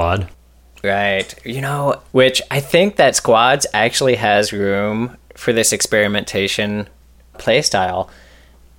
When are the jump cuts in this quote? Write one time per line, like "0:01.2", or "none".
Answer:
0:02.1
0:07.3